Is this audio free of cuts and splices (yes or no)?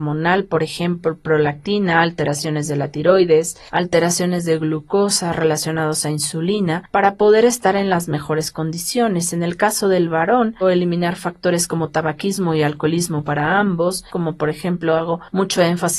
no